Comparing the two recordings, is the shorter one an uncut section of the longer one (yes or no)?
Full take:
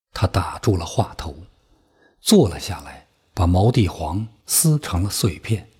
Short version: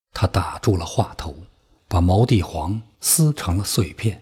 no